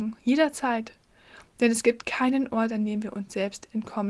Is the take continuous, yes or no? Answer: yes